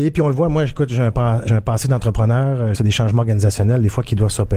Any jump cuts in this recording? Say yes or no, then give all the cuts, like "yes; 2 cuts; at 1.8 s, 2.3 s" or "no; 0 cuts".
yes; 2 cuts; at 1.5 s, 2.7 s